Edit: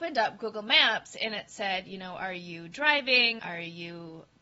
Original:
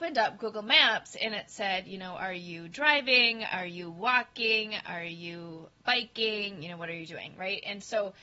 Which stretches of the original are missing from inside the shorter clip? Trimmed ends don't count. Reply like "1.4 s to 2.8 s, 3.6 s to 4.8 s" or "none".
3.4 s to 4.8 s